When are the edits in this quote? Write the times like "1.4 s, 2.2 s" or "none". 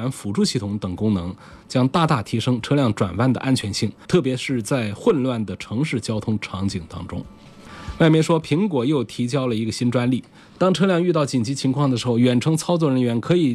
4.0 s